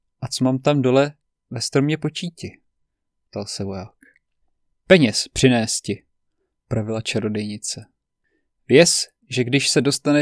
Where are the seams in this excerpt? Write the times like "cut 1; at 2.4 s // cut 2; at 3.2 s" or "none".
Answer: none